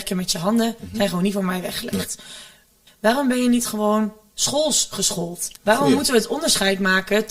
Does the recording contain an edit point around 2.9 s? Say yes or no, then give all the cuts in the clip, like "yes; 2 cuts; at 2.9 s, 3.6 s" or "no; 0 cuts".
yes; 2 cuts; at 2.9 s, 5.6 s